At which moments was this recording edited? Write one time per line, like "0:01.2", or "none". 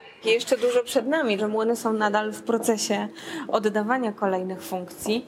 0:01.4